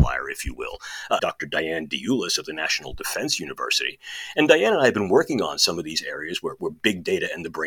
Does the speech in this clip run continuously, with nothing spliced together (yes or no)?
no